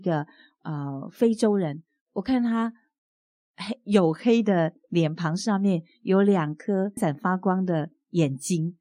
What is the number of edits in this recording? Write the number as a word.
one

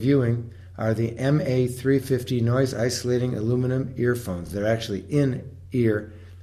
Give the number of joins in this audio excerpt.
zero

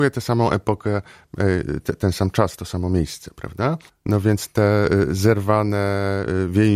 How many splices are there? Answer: one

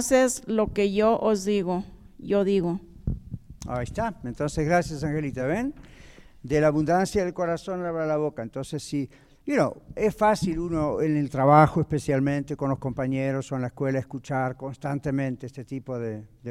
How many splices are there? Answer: zero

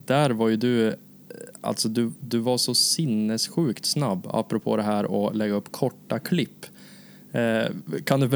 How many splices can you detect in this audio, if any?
zero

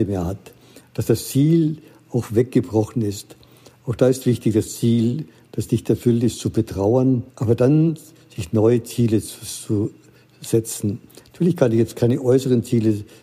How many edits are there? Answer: one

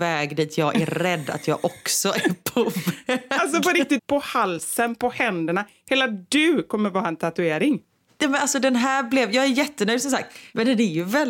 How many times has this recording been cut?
one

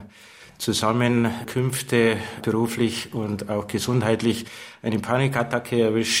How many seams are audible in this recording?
one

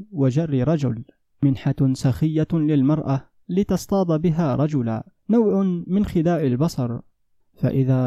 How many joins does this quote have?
one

